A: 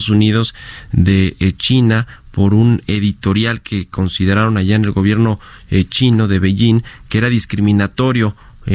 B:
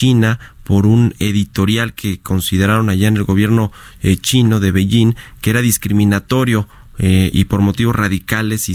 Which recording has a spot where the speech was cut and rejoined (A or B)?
B